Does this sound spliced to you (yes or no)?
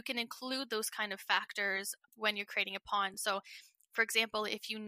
no